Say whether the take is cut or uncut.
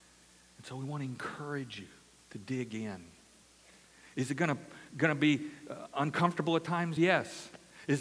uncut